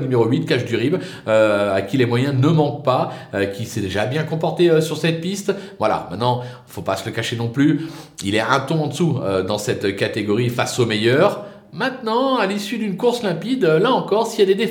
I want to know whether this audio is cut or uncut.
uncut